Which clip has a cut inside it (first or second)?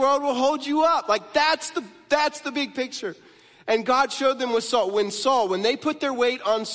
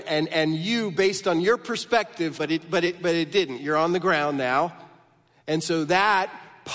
second